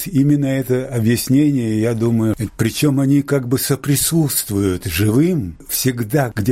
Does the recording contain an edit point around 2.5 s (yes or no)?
yes